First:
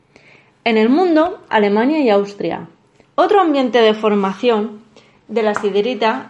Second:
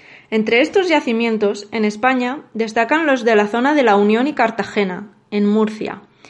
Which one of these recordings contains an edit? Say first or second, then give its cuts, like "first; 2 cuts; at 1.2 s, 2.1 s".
first; 2 cuts; at 1.5 s, 3.0 s